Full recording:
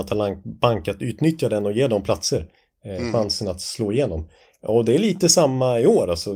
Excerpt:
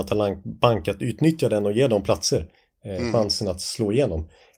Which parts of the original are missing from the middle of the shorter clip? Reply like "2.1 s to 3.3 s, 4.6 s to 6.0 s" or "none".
none